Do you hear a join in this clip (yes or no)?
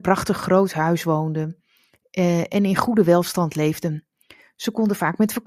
no